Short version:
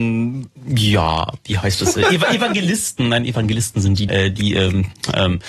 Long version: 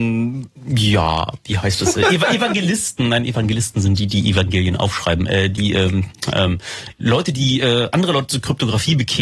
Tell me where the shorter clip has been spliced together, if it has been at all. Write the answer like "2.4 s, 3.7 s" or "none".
4.1 s